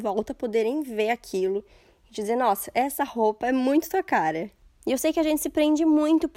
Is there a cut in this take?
no; 0 cuts

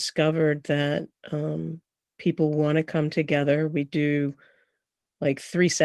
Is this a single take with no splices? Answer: yes; 0 cuts

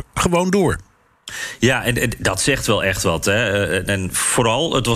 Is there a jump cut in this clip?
no; 0 cuts

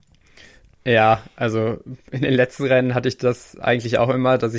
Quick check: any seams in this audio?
no; 0 cuts

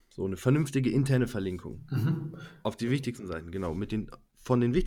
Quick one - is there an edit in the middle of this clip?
yes; 1 cut; at 2.6 s

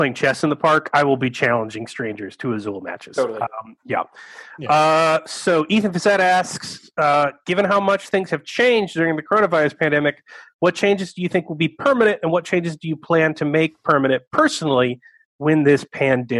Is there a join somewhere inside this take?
no; 0 cuts

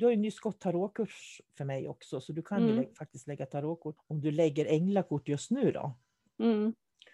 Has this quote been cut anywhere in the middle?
yes; 1 cut; at 4.0 s

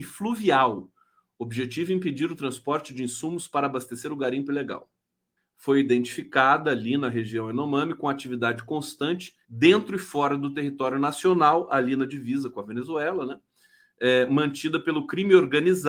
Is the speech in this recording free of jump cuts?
no; 2 cuts; at 5.4 s, 9.4 s

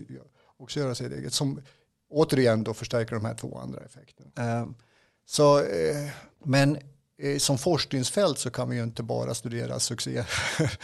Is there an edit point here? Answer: yes; 2 cuts; at 4.3 s, 6.3 s

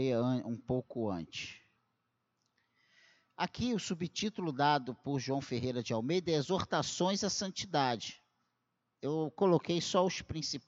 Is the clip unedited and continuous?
no; 1 cut; at 8.8 s

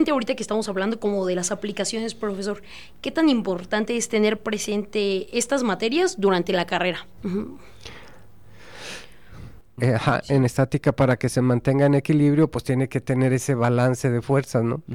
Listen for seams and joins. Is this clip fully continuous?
no; 2 cuts; at 7.2 s, 9.8 s

